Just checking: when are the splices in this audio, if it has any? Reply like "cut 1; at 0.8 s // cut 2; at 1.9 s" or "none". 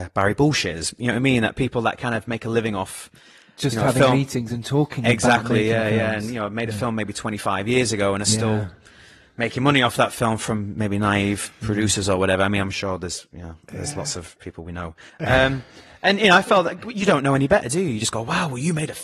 none